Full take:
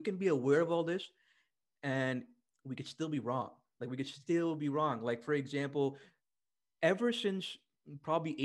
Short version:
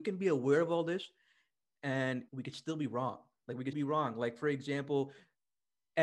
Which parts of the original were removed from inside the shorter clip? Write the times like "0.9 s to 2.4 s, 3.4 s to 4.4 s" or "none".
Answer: 2.3 s to 2.6 s, 4.0 s to 4.6 s